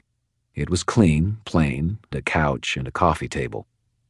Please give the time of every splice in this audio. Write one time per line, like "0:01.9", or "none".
0:02.1